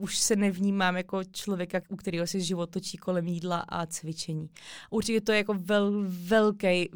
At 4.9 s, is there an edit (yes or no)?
no